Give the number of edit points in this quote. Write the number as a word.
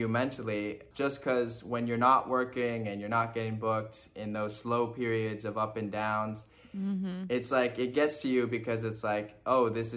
one